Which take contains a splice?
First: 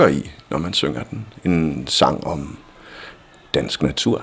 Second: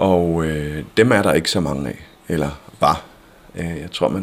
second; 1 cut; at 2.2 s

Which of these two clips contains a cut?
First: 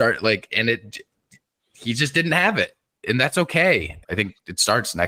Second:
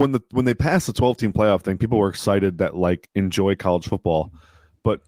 first; 1 cut; at 4.0 s

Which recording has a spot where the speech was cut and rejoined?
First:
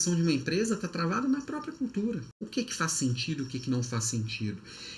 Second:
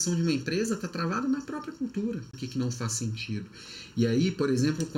second; 1 cut; at 2.3 s

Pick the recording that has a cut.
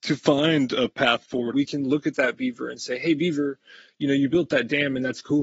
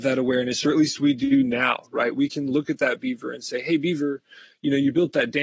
first; 1 cut; at 1.5 s

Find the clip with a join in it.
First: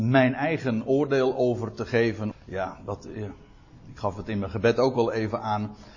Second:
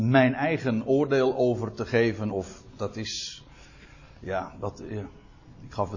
first; 1 cut; at 2.3 s

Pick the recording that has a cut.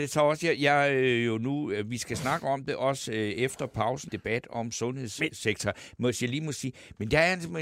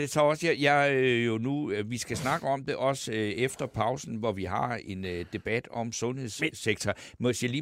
first; 1 cut; at 4.1 s

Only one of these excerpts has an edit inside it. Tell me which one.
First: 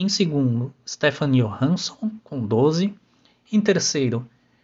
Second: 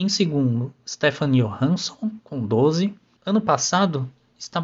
second; 1 cut; at 3.2 s

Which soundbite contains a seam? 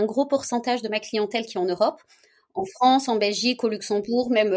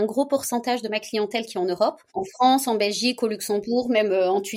second; 1 cut; at 2.1 s

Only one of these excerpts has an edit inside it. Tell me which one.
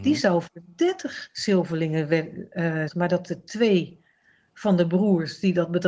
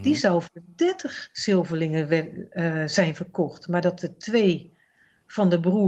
first; 1 cut; at 2.9 s

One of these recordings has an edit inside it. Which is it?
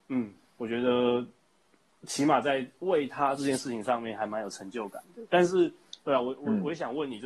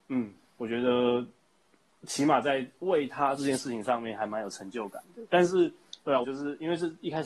second; 1 cut; at 6.2 s

